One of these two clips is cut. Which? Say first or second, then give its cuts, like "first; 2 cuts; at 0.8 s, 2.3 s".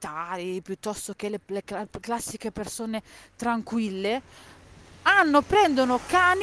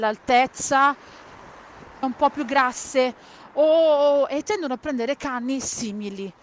second; 1 cut; at 2.0 s